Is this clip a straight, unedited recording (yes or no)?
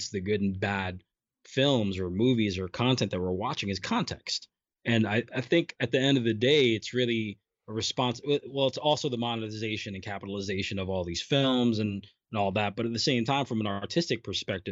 yes